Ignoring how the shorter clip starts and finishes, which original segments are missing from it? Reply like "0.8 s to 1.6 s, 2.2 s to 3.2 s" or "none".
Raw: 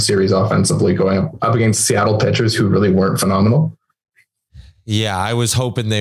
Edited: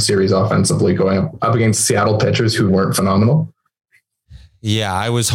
2.7 s to 2.9 s